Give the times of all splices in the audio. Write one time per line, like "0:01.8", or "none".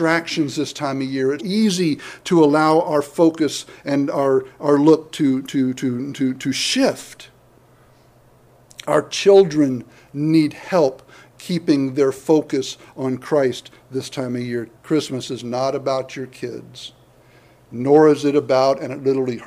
0:01.4
0:14.8